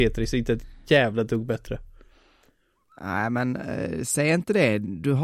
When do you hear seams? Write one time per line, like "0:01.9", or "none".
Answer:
none